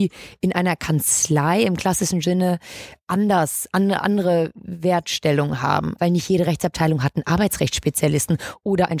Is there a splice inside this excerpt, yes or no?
yes